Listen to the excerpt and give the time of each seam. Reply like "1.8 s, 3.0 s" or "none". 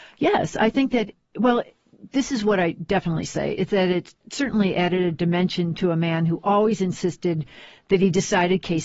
none